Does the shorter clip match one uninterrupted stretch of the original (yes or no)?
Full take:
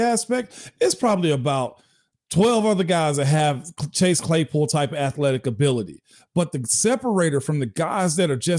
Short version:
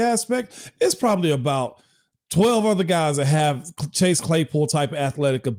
yes